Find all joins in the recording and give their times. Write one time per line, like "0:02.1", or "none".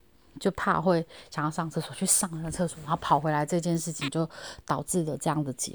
none